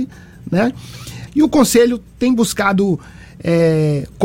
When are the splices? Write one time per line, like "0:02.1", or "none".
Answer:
0:01.3